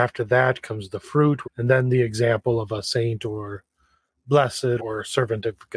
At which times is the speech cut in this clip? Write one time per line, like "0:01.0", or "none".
0:01.4
0:04.8